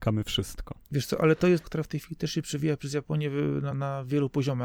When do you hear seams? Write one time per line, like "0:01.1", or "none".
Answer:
0:01.6
0:03.7